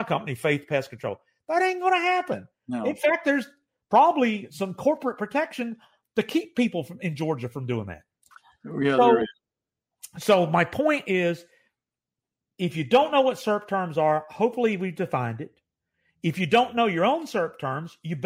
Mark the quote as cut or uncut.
uncut